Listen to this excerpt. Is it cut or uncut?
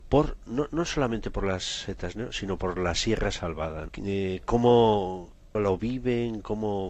cut